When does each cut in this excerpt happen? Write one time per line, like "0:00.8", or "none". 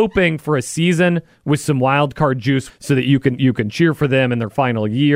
0:02.7